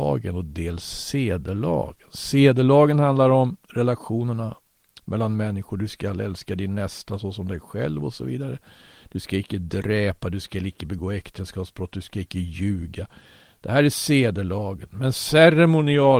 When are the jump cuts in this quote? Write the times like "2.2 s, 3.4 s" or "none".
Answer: none